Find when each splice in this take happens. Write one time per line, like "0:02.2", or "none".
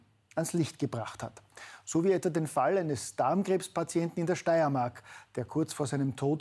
none